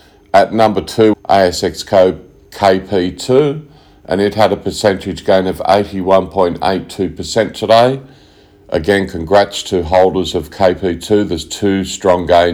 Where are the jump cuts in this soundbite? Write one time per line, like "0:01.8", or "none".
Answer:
0:01.1